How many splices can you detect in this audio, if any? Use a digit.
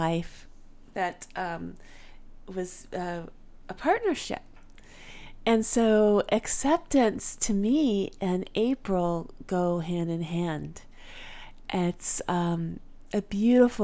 0